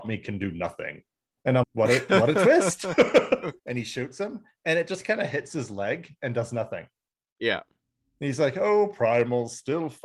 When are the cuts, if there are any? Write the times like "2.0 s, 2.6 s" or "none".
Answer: 1.6 s, 3.6 s